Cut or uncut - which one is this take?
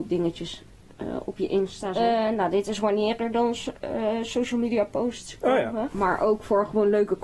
cut